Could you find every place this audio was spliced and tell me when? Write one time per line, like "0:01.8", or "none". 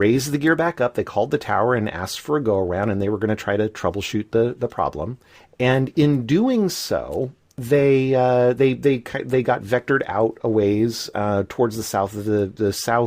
none